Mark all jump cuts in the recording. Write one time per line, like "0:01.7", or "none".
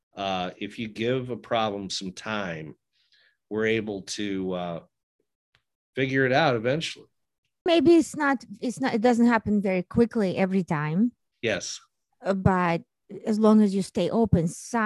0:07.7